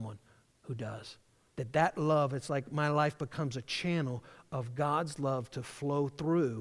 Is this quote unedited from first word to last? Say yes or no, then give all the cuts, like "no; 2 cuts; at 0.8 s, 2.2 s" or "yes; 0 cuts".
no; 1 cut; at 1.5 s